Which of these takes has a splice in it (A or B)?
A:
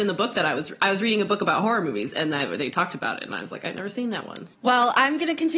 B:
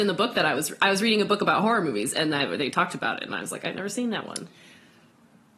A